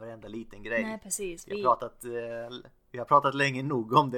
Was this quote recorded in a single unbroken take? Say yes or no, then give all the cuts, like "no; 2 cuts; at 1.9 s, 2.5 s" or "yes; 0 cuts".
yes; 0 cuts